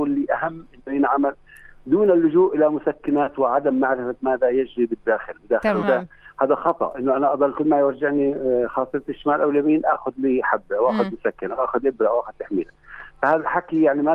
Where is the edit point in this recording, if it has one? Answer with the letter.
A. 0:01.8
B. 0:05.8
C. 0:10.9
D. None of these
B